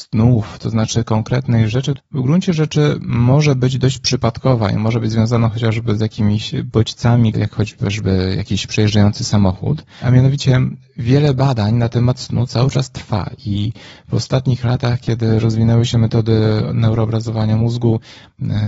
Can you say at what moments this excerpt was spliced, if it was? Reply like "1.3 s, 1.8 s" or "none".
2.0 s, 7.3 s, 10.0 s